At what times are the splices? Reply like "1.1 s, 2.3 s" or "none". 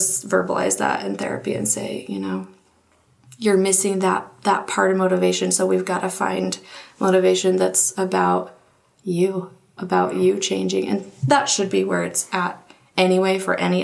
9.8 s